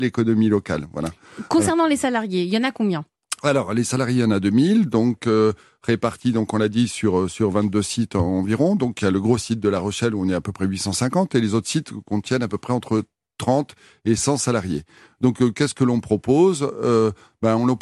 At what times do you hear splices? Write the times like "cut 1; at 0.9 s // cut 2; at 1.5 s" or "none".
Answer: none